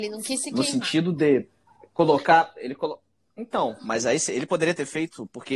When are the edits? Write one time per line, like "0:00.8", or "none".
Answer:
none